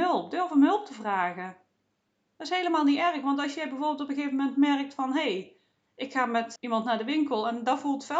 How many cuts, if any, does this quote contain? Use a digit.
1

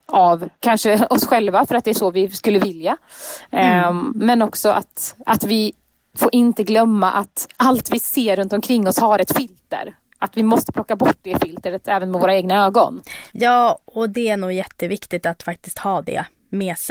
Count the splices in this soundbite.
0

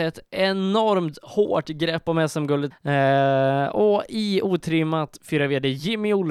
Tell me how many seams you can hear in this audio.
1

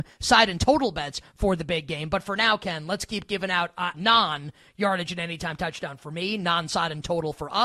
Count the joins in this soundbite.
1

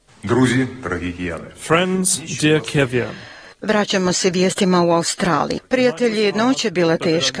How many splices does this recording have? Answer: 2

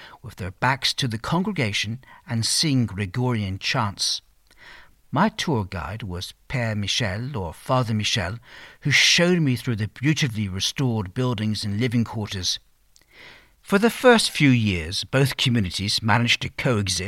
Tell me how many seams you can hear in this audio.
0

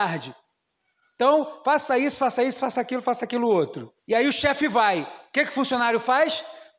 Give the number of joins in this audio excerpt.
1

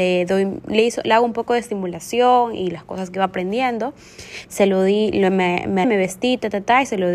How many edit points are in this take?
2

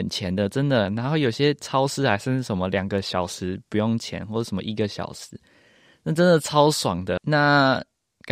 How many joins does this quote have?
1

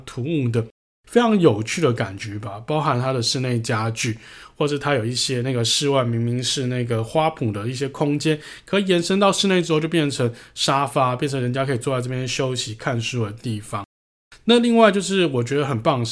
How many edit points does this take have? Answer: 0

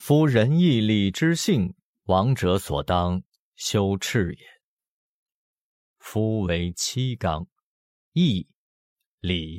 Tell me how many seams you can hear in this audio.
3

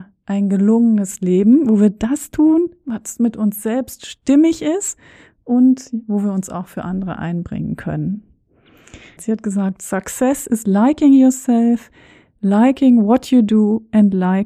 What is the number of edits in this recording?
1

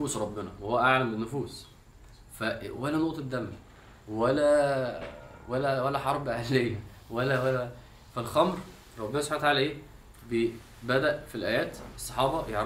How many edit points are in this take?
0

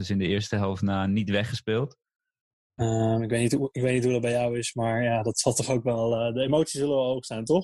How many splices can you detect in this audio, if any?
1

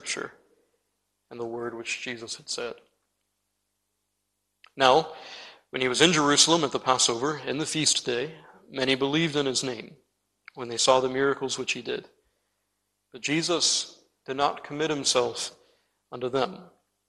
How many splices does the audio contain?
0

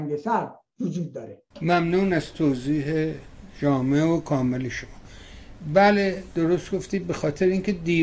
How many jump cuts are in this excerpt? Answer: 1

